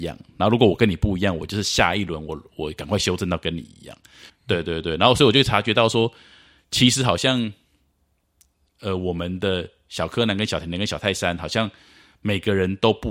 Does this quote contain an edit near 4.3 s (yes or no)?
yes